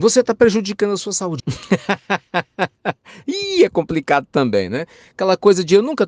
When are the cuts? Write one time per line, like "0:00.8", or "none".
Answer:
0:01.4